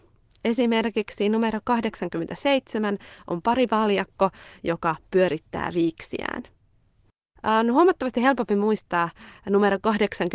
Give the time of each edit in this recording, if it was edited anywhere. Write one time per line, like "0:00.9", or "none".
0:04.6
0:07.3